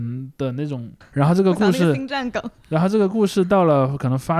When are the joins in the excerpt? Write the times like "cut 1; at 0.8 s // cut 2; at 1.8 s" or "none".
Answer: cut 1; at 1.0 s